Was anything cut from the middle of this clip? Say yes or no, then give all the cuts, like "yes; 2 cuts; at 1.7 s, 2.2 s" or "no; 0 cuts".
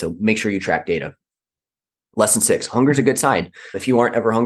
no; 0 cuts